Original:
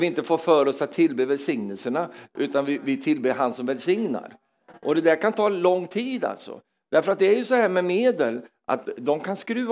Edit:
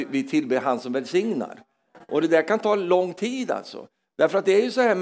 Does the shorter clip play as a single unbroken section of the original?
yes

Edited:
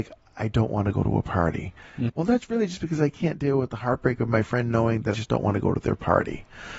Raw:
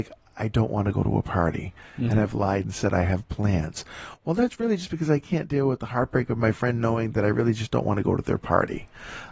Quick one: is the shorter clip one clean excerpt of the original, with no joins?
no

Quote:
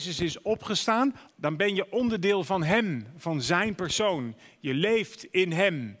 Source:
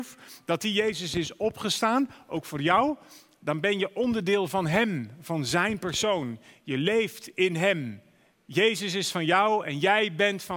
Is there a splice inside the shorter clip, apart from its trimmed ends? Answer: yes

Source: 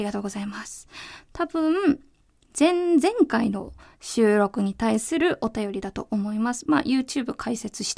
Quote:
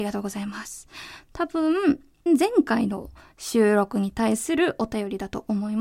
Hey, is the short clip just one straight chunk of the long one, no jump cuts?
no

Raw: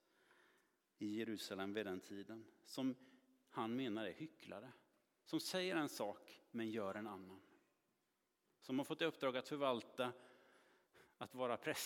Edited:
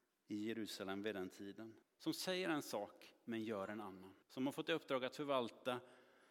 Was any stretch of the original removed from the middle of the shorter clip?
yes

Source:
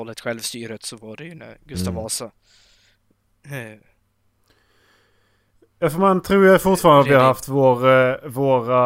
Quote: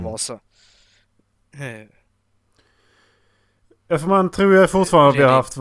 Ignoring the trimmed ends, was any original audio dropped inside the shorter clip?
no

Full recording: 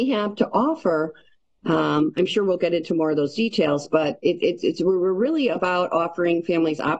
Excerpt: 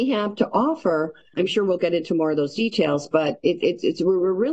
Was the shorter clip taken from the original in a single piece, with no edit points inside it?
no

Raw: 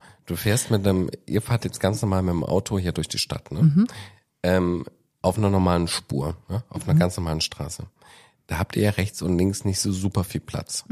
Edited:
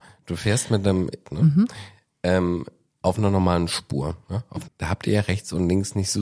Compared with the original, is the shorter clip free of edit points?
no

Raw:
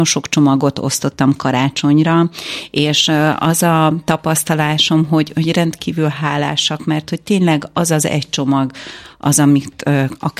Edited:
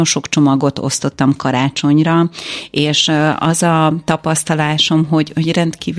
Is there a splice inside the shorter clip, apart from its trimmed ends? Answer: no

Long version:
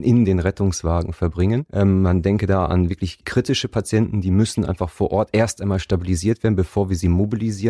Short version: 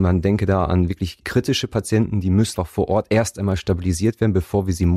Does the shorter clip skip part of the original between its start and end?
yes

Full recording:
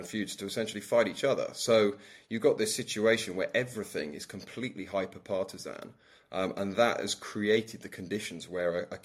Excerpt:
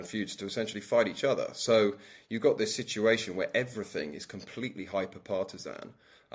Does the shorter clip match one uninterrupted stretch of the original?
yes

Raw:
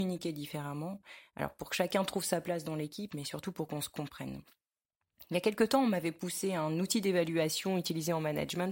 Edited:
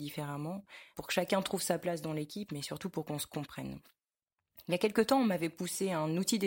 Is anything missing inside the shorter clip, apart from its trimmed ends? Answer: yes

